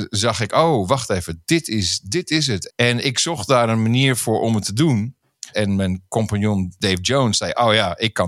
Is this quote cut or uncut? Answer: cut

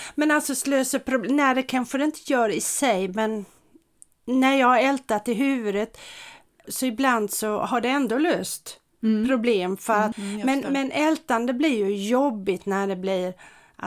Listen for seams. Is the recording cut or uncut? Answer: cut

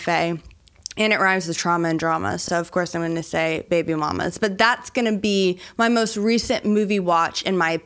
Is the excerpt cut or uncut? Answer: uncut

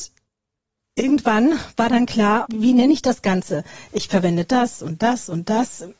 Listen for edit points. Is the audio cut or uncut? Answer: cut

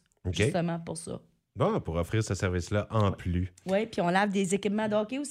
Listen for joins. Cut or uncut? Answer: uncut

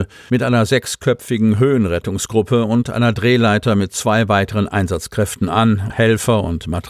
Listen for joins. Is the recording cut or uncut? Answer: cut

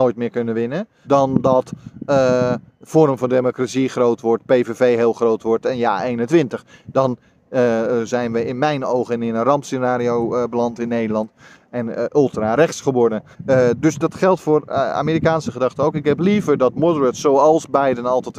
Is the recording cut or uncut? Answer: cut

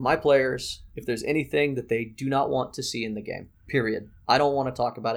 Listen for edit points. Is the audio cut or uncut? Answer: uncut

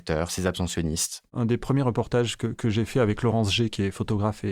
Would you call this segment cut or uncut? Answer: cut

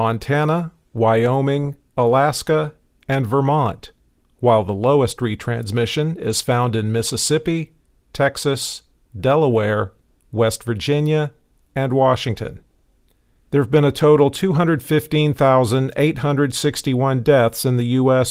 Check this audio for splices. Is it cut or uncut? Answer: cut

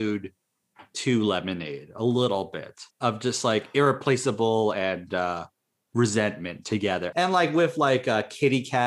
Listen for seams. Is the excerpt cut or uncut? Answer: cut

